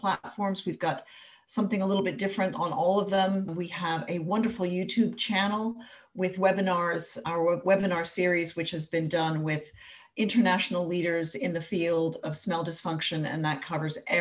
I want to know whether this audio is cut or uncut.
uncut